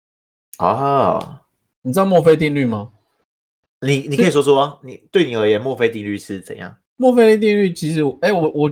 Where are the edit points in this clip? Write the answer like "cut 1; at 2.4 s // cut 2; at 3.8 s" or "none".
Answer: cut 1; at 6.9 s